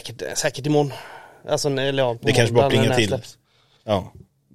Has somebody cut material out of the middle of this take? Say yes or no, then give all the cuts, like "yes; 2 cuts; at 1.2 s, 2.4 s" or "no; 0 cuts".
no; 0 cuts